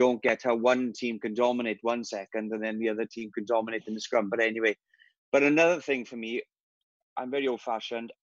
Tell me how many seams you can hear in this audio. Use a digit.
0